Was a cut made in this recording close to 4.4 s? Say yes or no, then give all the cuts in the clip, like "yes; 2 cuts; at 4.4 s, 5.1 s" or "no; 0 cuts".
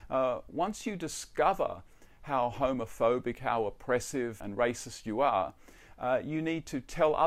yes; 1 cut; at 4.4 s